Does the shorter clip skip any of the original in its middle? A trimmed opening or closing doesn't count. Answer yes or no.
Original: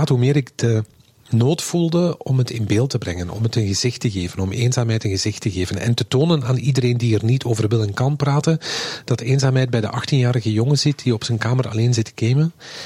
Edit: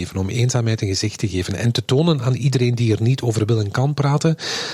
no